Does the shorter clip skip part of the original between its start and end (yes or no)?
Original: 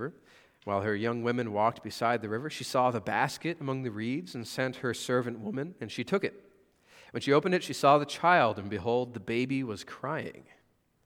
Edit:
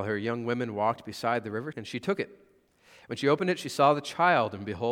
yes